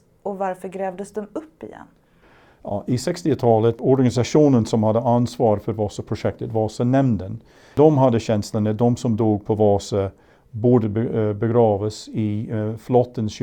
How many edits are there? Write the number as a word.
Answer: zero